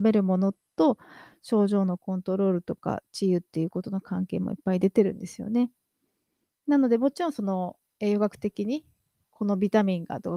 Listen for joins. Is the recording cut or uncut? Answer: uncut